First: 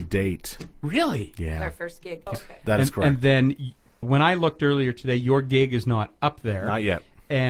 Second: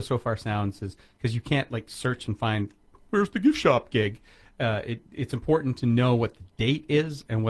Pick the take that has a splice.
first; 2 cuts; at 2.3 s, 4.0 s

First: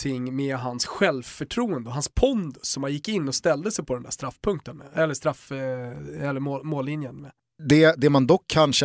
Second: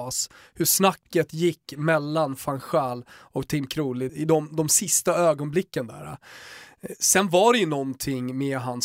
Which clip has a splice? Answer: second; 1 cut; at 4.1 s

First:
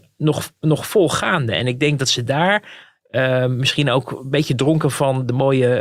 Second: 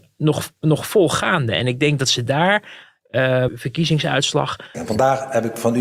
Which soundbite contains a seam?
second; 2 cuts; at 3.5 s, 4.7 s

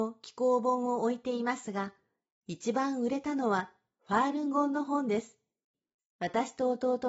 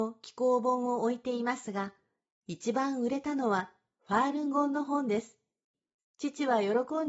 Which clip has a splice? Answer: second; 1 cut; at 6.0 s

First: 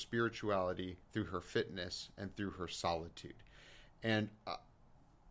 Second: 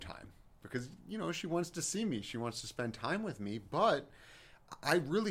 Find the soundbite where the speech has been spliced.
first; 1 cut; at 1.0 s

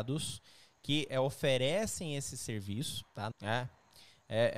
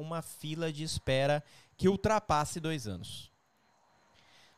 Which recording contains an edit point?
first; 1 cut; at 3.3 s

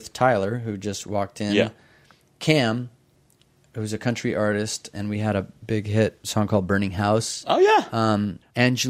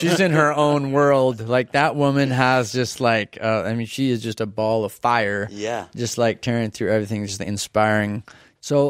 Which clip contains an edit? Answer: first; 2 cuts; at 4.9 s, 6.2 s

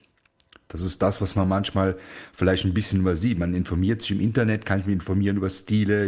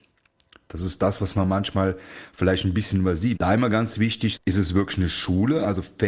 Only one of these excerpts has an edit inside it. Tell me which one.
second; 2 cuts; at 3.4 s, 4.4 s

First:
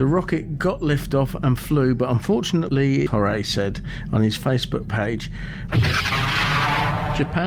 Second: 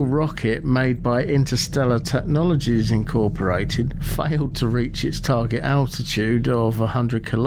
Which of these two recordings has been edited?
first; 2 cuts; at 3.1 s, 5.7 s

